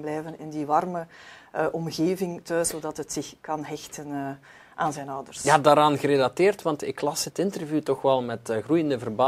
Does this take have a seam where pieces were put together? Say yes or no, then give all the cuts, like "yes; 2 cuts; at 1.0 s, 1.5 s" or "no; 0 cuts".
no; 0 cuts